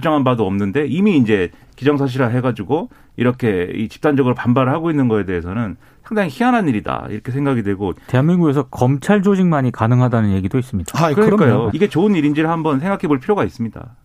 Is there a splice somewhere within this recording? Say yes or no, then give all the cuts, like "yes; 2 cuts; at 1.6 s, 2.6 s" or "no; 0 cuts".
yes; 1 cut; at 11.7 s